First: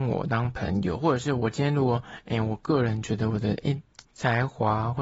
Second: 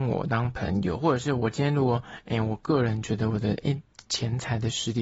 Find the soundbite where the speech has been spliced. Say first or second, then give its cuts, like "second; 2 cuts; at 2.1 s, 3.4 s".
first; 1 cut; at 4.0 s